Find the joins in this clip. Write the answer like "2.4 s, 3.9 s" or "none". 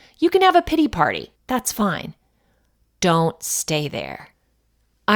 1.4 s